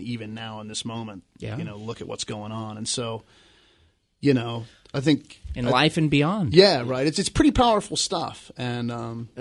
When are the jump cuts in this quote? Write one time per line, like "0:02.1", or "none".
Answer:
none